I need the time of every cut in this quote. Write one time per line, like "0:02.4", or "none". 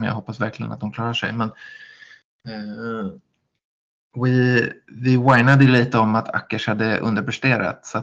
none